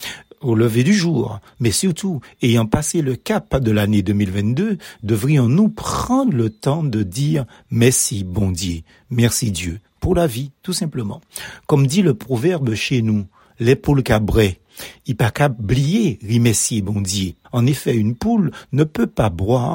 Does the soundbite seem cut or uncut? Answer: cut